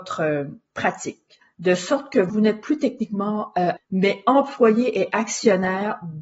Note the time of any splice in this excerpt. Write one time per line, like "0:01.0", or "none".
0:01.4
0:03.8